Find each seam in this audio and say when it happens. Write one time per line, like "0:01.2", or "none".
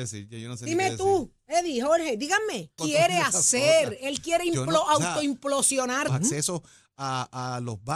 0:02.8
0:06.1